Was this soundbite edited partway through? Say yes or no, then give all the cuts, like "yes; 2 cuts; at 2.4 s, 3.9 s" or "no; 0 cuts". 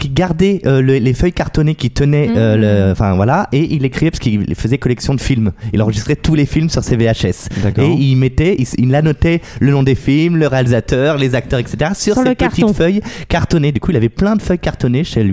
no; 0 cuts